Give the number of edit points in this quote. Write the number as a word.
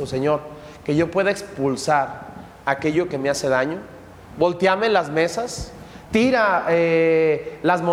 zero